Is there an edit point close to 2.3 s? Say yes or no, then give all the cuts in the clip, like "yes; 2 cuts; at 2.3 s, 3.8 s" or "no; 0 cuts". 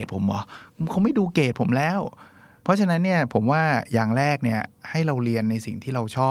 no; 0 cuts